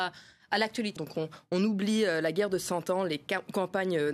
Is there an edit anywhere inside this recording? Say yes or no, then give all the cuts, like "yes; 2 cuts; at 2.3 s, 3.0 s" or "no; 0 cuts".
yes; 1 cut; at 1.0 s